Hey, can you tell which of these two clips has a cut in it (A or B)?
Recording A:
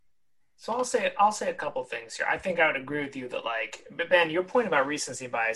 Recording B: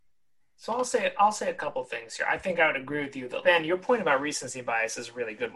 B